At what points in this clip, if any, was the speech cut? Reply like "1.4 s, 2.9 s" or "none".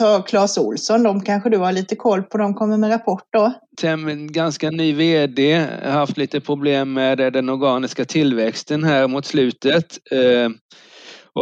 3.7 s